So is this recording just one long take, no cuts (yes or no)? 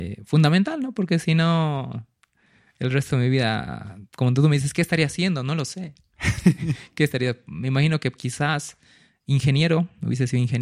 yes